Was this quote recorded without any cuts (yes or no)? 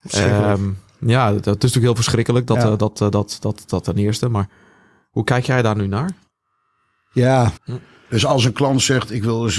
no